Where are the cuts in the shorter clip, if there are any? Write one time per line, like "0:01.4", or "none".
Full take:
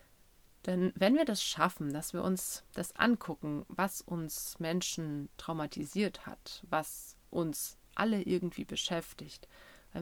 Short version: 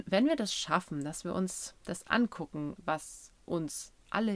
0:02.8